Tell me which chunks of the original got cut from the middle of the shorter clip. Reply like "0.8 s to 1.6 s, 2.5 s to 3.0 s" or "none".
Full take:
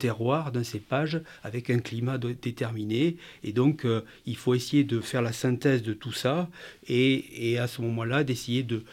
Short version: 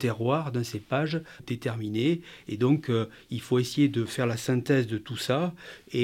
1.4 s to 2.4 s